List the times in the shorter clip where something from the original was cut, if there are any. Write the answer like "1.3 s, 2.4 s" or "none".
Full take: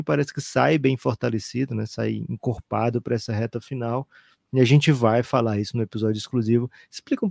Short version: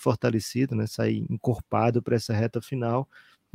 none